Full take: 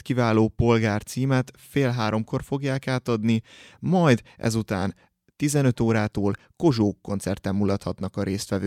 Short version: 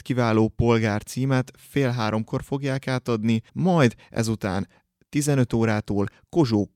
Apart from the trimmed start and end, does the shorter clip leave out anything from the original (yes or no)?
yes